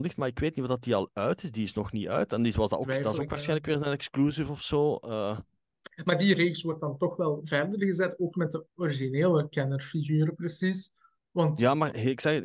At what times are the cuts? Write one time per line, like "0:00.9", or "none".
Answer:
none